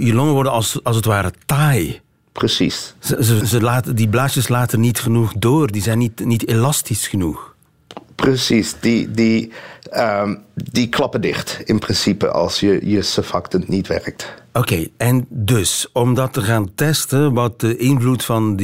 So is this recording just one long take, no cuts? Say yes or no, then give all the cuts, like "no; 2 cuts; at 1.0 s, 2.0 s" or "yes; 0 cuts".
no; 1 cut; at 3.4 s